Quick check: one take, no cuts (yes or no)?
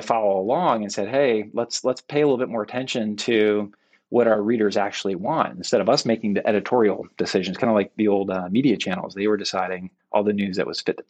yes